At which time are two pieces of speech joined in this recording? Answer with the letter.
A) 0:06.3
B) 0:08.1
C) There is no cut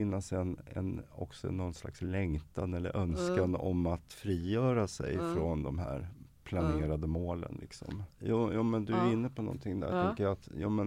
B